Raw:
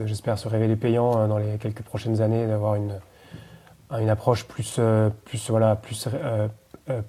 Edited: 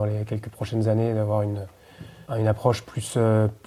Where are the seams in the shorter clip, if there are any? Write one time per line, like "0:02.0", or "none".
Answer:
0:02.3